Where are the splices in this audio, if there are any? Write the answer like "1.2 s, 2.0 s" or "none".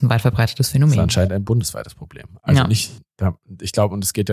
none